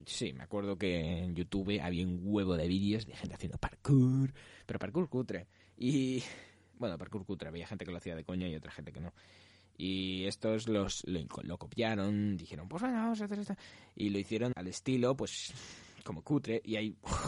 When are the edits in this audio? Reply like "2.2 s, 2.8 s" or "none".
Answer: 14.5 s